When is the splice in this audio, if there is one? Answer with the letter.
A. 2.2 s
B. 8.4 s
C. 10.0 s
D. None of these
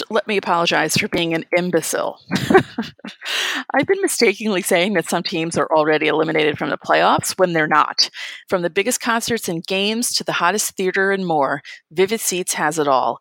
B